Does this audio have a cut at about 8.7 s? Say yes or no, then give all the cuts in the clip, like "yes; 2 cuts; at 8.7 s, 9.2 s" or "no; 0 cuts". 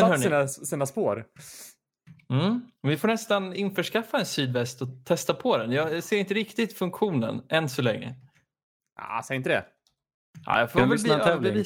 no; 0 cuts